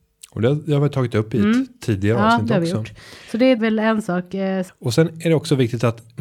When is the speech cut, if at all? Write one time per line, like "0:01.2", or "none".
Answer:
0:03.6
0:04.7